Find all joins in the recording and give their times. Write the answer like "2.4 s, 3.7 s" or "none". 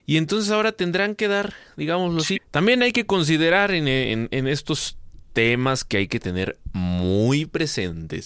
2.3 s

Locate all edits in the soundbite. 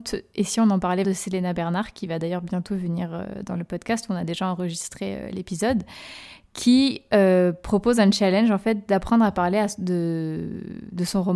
1.0 s

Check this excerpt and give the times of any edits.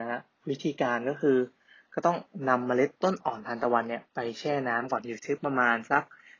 2.9 s

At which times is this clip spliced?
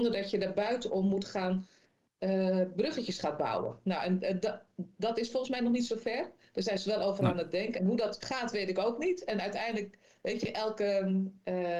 none

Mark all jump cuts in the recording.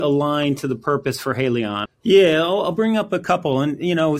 1.9 s

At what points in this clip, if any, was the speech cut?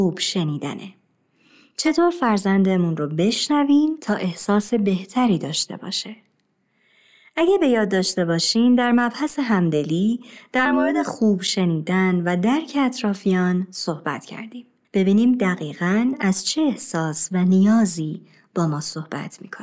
14.8 s

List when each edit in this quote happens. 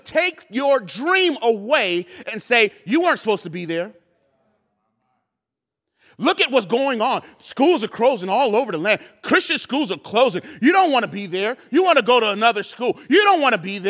none

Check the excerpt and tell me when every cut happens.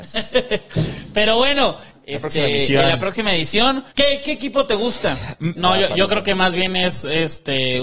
1.9 s, 3.9 s, 5.6 s

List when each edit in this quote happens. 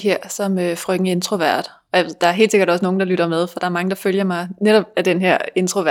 none

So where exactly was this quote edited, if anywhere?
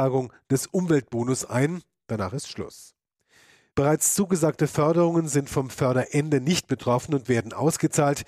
none

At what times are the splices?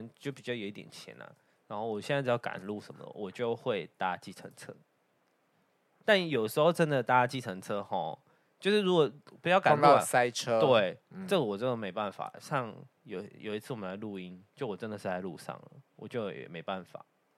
none

